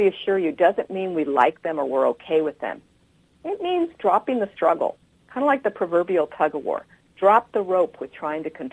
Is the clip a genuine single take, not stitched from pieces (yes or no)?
yes